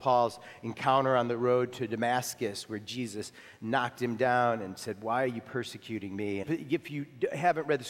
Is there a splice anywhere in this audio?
yes; 1 cut; at 6.4 s

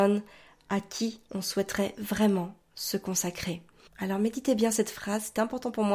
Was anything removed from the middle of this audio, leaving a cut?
yes; 1 cut; at 3.9 s

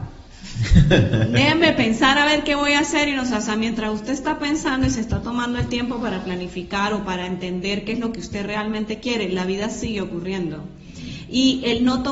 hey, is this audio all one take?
yes; 0 cuts

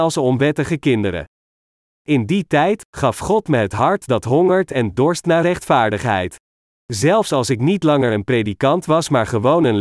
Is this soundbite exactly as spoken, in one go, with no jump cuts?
no; 1 cut; at 6.8 s

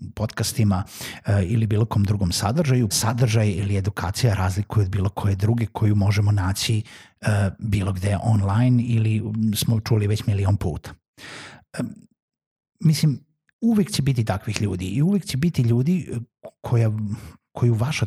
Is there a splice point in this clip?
yes; 1 cut; at 2.9 s

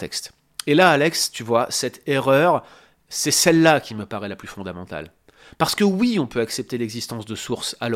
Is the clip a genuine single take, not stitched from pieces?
yes; 0 cuts

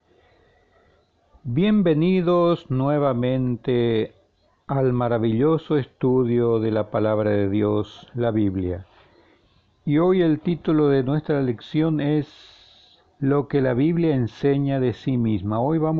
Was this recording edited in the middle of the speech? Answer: no; 0 cuts

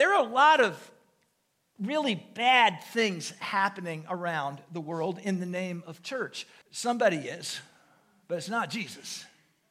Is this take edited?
yes; 1 cut; at 6.6 s

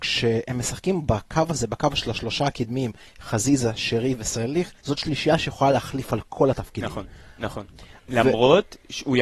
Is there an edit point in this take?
yes; 2 cuts; at 4.8 s, 7.4 s

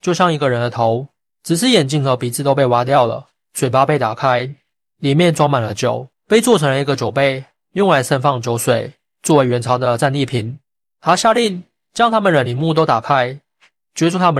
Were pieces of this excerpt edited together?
yes; 3 cuts; at 1.3 s, 6.1 s, 10.8 s

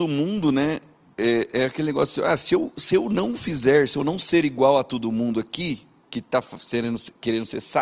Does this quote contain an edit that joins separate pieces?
no; 0 cuts

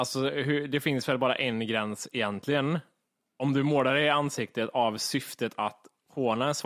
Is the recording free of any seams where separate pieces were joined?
yes; 0 cuts

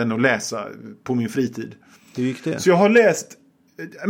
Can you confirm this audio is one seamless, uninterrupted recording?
yes; 0 cuts

